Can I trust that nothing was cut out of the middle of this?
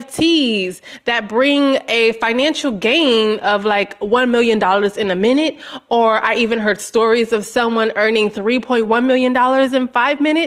yes; 0 cuts

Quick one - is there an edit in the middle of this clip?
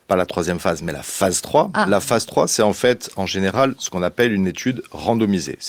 no; 0 cuts

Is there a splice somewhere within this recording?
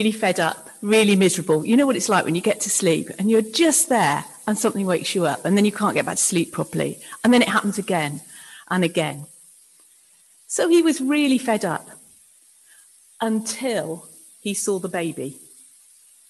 no; 0 cuts

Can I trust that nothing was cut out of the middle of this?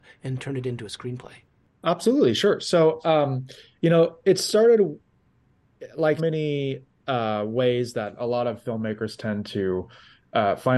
no; 1 cut; at 6.2 s

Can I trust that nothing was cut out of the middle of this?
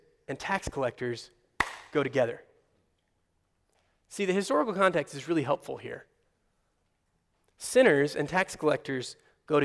yes; 0 cuts

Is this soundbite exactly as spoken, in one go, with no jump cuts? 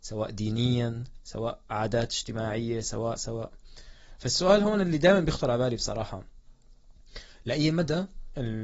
no; 1 cut; at 3.2 s

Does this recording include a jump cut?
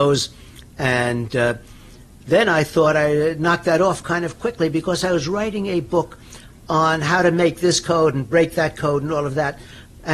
no; 0 cuts

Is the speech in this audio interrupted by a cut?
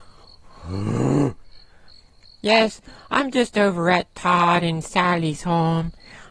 no; 0 cuts

